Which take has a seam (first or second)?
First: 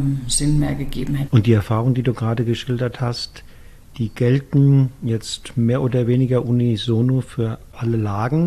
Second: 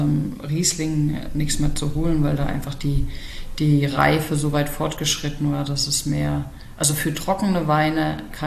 first